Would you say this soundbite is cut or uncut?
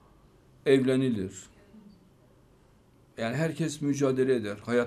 uncut